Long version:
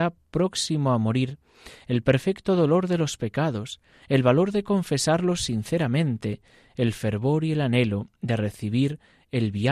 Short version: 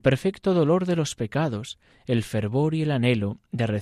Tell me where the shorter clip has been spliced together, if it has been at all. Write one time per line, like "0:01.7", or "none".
0:01.9